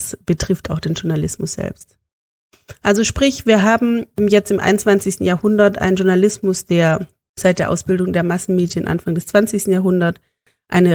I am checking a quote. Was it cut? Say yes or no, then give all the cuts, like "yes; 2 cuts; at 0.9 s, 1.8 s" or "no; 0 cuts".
no; 0 cuts